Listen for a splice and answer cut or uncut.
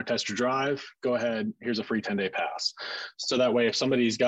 cut